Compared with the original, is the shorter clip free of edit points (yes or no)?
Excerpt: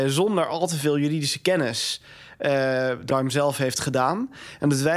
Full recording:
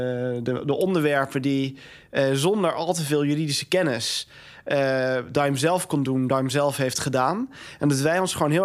no